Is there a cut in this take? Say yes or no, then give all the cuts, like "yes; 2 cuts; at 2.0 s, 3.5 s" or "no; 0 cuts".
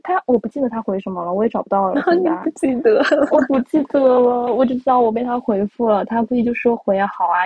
no; 0 cuts